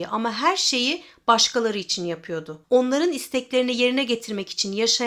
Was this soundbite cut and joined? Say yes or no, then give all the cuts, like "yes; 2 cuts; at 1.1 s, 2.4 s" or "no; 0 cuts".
yes; 1 cut; at 2.6 s